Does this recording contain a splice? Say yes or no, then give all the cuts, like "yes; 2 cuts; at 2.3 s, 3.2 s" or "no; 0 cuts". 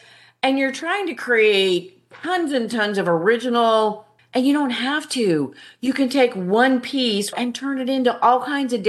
yes; 2 cuts; at 4.2 s, 7.3 s